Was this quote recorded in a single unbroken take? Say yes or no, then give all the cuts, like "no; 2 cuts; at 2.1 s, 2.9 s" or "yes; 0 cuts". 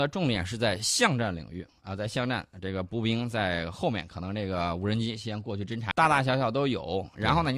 no; 1 cut; at 5.9 s